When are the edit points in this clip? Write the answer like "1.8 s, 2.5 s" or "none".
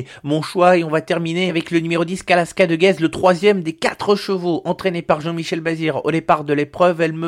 none